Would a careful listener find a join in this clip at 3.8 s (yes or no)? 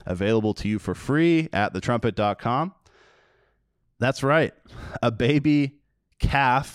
yes